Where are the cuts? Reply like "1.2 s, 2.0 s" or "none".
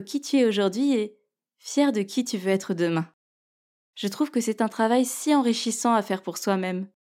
none

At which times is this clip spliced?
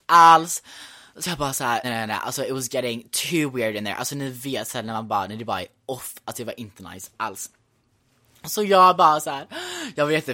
1.8 s

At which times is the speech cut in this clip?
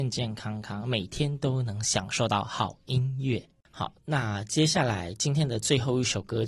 none

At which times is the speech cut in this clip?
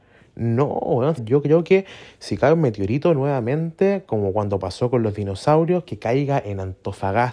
1.2 s

